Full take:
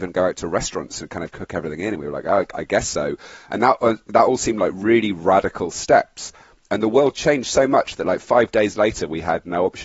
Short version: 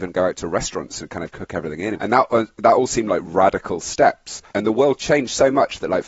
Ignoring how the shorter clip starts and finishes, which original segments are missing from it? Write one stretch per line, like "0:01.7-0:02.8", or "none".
0:01.9-0:03.5
0:04.7-0:05.1
0:06.4-0:06.7